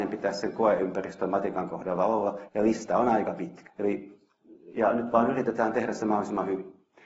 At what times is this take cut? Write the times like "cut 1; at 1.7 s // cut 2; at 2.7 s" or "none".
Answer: cut 1; at 2.5 s // cut 2; at 3.7 s